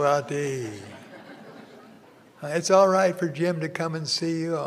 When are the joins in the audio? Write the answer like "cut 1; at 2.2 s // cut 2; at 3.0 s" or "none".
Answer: none